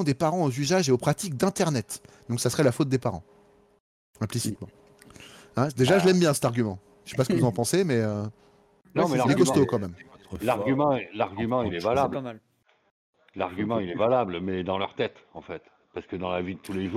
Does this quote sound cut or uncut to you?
uncut